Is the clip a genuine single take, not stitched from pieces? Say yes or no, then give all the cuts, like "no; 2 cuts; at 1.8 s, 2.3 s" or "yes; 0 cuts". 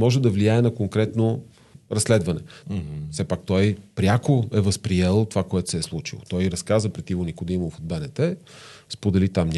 no; 1 cut; at 2.6 s